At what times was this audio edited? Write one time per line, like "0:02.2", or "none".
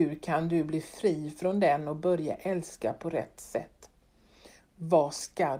0:04.6